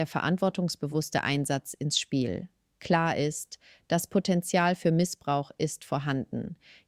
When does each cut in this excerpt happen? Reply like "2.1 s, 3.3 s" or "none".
none